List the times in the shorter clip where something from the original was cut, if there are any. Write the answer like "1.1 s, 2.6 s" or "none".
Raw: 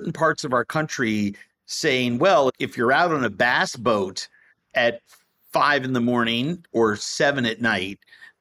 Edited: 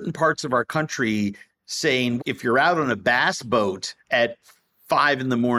2.2 s, 4.0 s